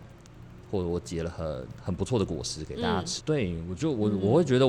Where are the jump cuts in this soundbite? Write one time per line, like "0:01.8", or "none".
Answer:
0:03.2